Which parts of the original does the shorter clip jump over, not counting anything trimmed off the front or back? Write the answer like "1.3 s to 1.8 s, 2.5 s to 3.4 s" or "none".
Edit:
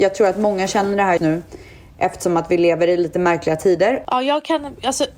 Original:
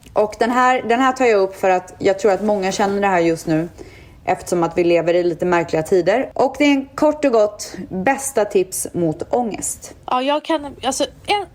3.2 s to 3.4 s, 6.3 s to 10.1 s